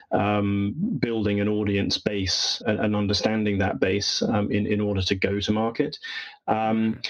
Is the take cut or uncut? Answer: cut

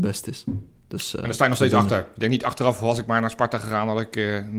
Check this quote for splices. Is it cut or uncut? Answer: uncut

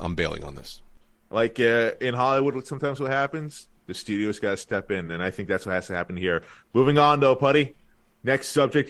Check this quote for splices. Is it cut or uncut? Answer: uncut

